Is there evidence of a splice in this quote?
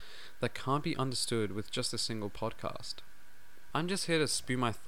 yes; 1 cut; at 3.7 s

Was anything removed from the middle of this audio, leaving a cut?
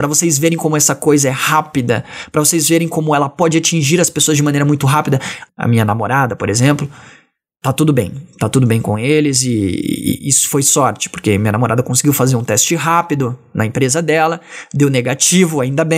yes; 1 cut; at 5.5 s

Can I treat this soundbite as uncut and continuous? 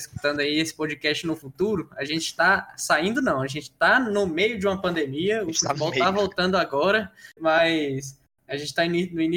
no; 1 cut; at 7.4 s

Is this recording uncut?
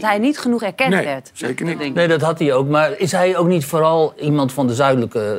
yes; 0 cuts

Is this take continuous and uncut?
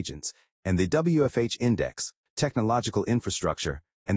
no; 1 cut; at 2.3 s

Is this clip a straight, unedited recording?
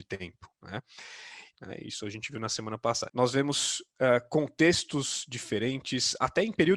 no; 2 cuts; at 1.5 s, 3.1 s

